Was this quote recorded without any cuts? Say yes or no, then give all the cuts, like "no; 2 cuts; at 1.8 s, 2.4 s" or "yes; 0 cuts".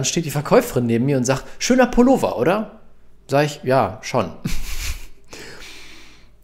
yes; 0 cuts